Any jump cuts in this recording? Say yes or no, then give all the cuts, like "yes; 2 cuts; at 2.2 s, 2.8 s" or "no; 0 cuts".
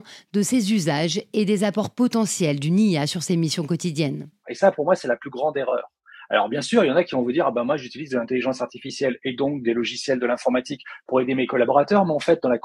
yes; 1 cut; at 4.4 s